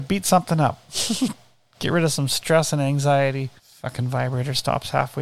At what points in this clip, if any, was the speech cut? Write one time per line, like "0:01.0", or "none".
0:03.6